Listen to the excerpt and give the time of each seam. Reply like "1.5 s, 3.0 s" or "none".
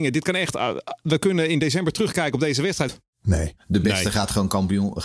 2.9 s